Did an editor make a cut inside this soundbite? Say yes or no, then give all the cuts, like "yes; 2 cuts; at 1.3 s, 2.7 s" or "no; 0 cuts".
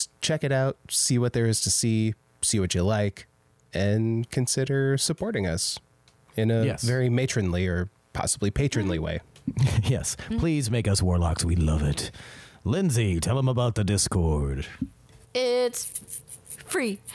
no; 0 cuts